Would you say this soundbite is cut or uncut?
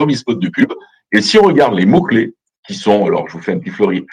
uncut